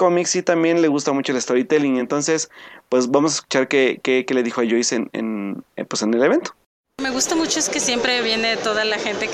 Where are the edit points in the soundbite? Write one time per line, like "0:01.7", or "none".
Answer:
none